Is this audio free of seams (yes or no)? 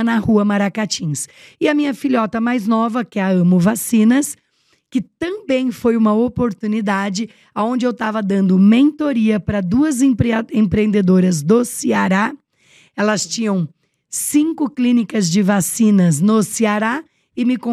yes